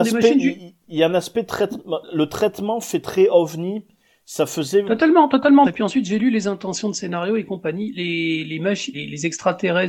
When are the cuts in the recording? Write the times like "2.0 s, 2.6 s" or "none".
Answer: 5.6 s, 8.9 s

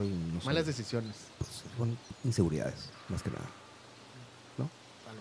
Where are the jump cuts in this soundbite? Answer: none

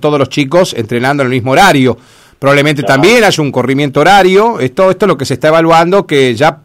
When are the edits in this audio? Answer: none

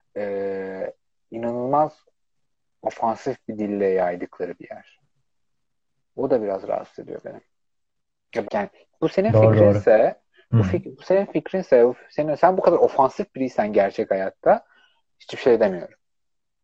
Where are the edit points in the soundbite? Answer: 8.4 s

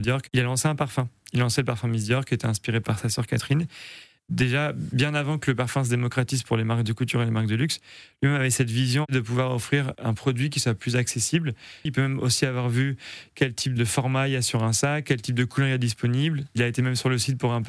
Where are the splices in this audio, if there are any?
11.9 s

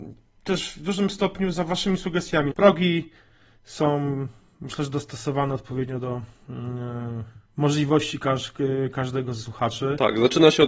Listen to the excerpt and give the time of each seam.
2.5 s, 7.5 s

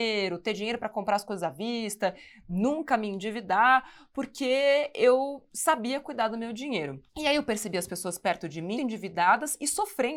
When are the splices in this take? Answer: 7.1 s, 8.8 s

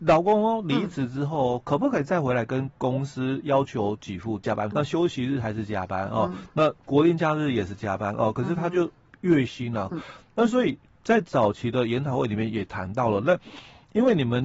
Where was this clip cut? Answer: 4.7 s, 9.9 s

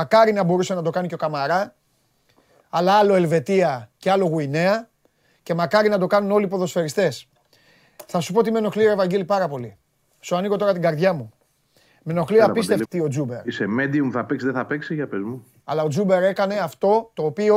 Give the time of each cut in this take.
12.8 s, 15.6 s

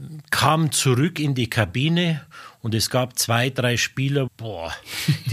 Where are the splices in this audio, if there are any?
4.3 s

